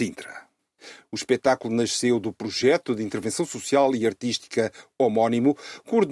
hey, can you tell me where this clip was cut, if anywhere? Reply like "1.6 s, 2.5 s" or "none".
1.0 s